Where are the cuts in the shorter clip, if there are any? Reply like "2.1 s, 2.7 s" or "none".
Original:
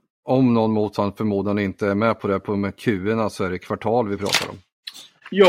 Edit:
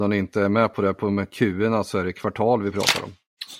none